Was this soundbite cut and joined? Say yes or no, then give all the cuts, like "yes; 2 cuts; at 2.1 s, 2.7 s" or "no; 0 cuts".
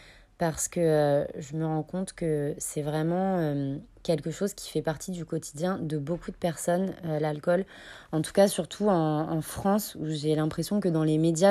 no; 0 cuts